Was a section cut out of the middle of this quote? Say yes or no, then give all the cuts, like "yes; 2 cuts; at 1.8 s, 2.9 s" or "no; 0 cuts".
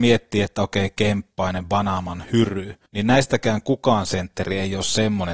yes; 1 cut; at 2.9 s